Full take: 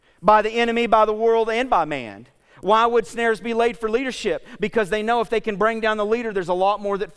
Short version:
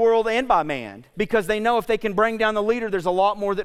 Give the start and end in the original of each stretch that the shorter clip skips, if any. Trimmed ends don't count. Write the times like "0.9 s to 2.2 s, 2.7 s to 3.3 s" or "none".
2.4 s to 4.6 s